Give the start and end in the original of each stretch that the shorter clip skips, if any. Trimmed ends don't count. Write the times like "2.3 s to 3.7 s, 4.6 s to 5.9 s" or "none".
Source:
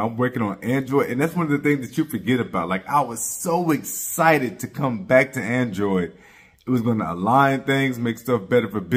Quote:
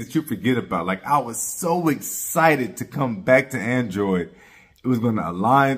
none